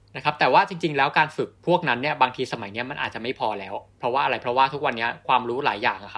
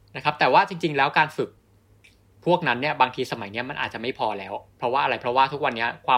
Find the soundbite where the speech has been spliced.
first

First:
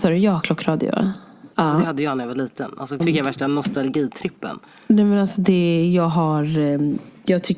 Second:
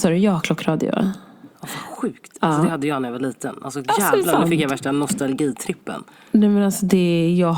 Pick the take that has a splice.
first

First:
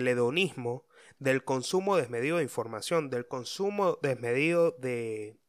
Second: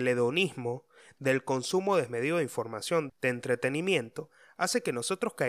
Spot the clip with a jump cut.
second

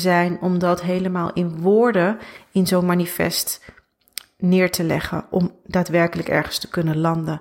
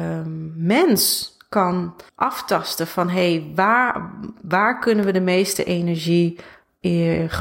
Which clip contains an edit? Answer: second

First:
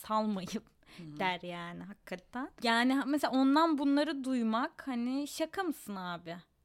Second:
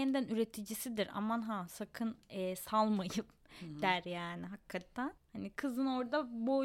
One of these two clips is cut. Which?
second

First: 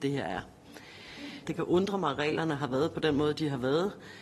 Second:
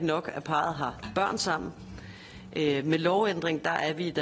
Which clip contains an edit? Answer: first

